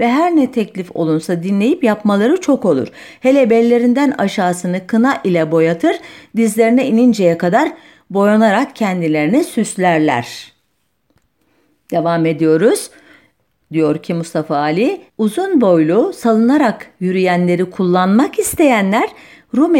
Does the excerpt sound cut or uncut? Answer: cut